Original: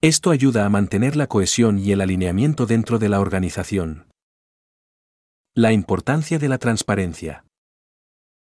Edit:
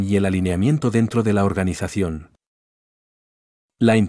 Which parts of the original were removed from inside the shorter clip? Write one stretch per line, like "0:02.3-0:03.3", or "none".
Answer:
none